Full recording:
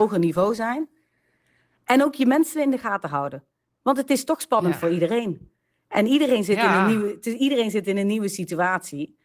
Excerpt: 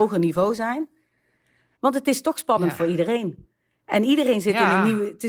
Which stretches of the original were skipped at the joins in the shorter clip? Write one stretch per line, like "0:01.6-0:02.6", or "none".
0:01.7-0:03.8